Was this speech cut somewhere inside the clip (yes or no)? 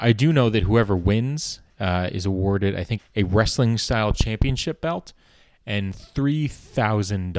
yes